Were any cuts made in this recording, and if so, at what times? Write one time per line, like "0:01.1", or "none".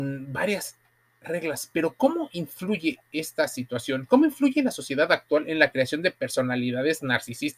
none